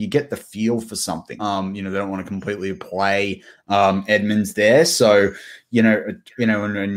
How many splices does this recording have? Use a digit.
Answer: 1